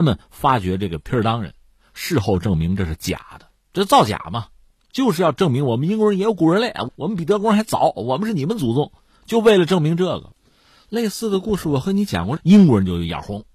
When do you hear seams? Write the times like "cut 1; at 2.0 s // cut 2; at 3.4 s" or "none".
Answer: cut 1; at 12.4 s